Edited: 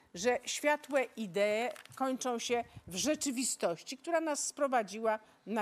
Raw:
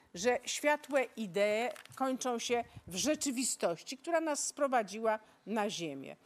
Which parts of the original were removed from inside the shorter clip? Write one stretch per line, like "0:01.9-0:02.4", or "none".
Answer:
none